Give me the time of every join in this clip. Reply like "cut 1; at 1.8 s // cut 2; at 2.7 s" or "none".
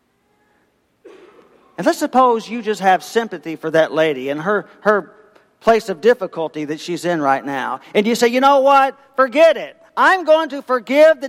none